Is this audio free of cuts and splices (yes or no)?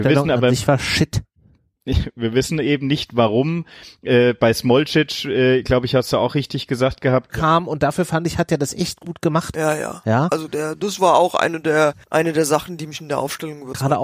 no